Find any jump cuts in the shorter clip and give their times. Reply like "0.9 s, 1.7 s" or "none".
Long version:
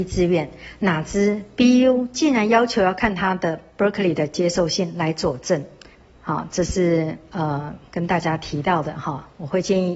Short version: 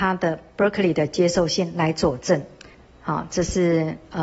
none

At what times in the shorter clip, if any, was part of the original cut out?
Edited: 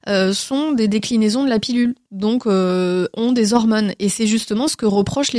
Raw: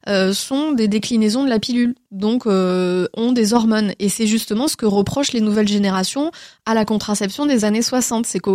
none

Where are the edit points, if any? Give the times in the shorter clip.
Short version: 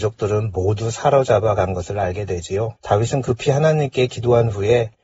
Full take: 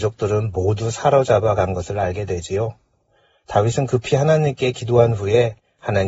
2.8 s

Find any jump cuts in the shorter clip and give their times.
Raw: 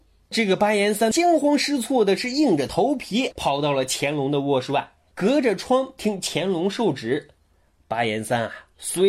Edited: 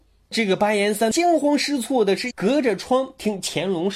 2.3 s

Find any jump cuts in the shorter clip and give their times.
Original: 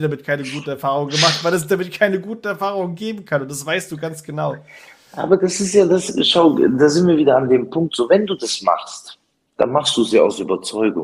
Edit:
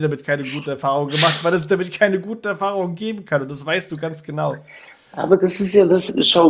none

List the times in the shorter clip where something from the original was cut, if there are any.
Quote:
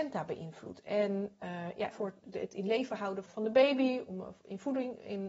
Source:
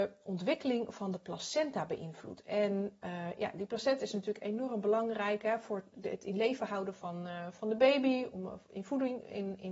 1.9 s, 3.3 s

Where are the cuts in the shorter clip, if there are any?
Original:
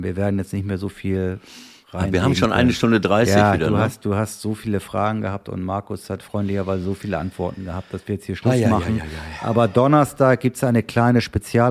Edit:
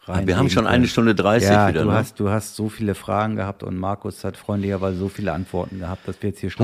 none

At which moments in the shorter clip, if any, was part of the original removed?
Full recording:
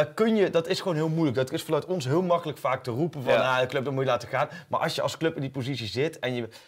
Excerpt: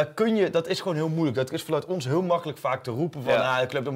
none

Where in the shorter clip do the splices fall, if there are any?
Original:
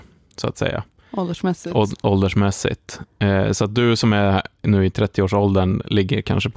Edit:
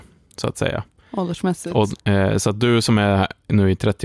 2.0 s

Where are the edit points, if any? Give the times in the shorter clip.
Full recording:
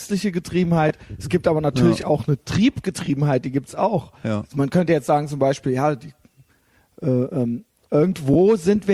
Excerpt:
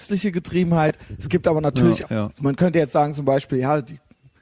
2.0 s

